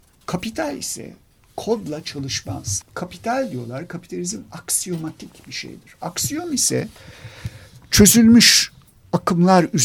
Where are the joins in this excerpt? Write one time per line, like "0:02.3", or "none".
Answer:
0:02.8